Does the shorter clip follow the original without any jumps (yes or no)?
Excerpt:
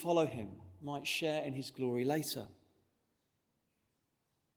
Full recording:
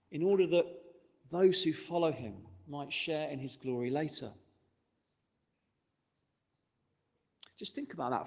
yes